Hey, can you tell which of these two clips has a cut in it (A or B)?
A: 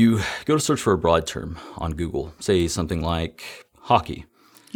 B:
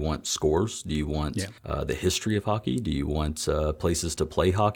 B